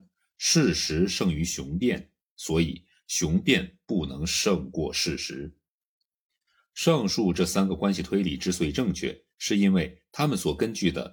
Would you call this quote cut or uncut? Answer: uncut